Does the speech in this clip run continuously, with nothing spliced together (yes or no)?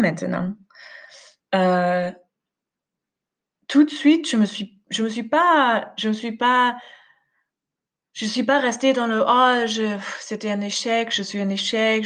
yes